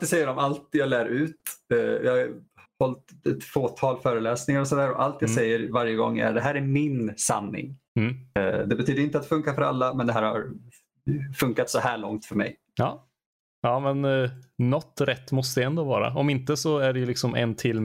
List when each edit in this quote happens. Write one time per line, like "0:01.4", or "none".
0:07.9